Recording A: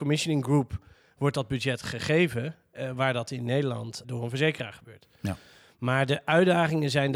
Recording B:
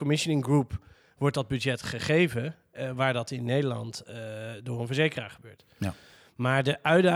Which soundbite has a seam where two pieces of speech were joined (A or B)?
A